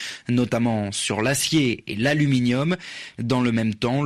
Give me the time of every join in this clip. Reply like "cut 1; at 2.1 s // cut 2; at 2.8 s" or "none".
cut 1; at 3.2 s